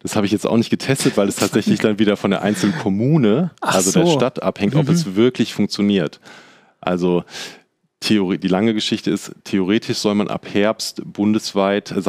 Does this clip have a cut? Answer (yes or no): no